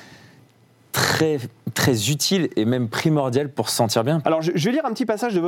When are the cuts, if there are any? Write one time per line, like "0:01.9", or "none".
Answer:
0:04.2